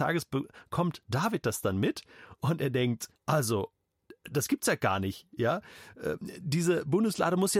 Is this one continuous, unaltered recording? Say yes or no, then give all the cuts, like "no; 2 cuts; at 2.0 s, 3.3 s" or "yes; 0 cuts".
no; 1 cut; at 3.2 s